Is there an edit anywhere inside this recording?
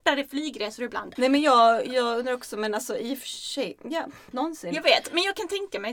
yes; 2 cuts; at 1.2 s, 4.3 s

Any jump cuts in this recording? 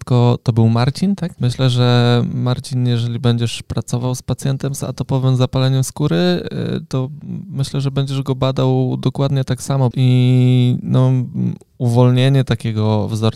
yes; 2 cuts; at 1.4 s, 9.9 s

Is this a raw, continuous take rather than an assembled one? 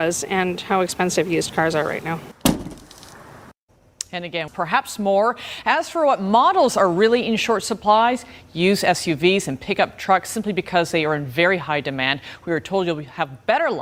no; 1 cut; at 4.5 s

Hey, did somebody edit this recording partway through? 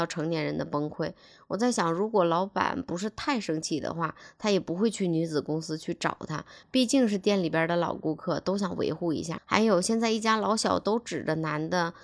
yes; 1 cut; at 9.4 s

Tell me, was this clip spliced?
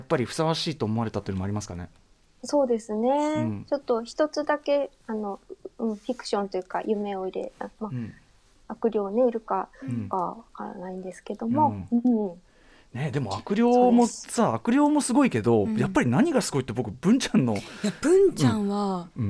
no; 0 cuts

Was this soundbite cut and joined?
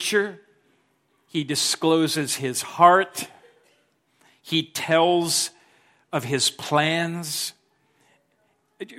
no; 0 cuts

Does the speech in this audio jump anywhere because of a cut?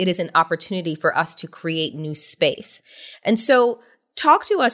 no; 0 cuts

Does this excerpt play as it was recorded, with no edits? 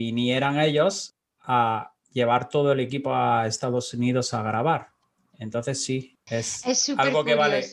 yes; 0 cuts

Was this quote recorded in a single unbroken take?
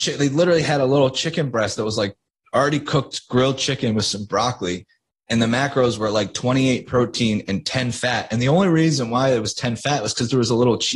yes; 0 cuts

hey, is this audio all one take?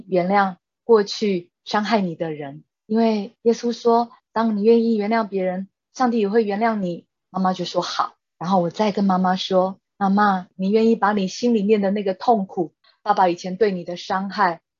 yes; 0 cuts

